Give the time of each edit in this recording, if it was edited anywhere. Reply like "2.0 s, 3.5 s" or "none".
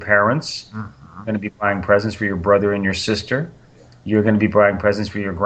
none